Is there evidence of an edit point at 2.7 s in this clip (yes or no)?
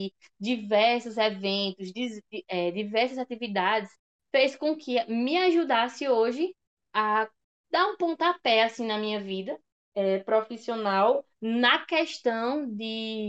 no